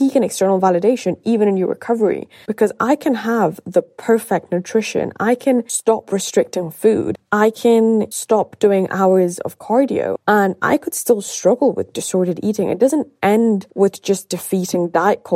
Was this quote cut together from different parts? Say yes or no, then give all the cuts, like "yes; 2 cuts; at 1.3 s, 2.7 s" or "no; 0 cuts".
yes; 1 cut; at 2.5 s